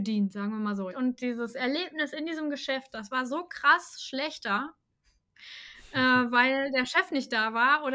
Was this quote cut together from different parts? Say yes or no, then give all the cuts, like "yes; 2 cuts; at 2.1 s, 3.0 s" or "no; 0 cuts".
yes; 1 cut; at 0.9 s